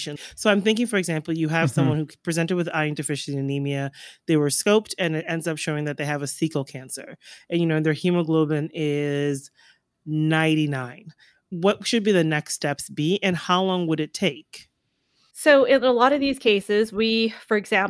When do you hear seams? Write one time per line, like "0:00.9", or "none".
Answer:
none